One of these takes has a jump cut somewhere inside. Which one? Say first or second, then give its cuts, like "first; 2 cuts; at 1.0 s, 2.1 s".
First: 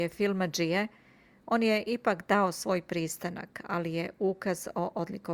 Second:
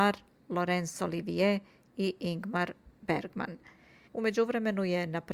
second; 1 cut; at 4.0 s